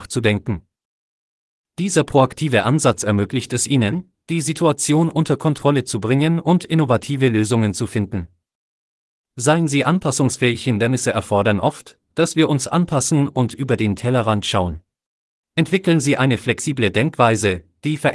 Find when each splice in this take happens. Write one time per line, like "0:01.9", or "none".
0:15.4

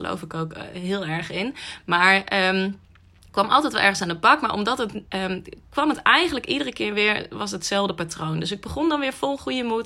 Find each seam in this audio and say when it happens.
0:05.0

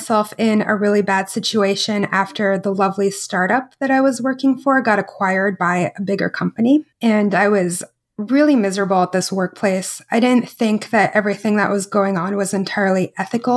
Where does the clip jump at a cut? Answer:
0:06.9

